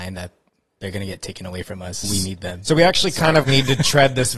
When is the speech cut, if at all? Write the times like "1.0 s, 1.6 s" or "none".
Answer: 2.0 s, 3.4 s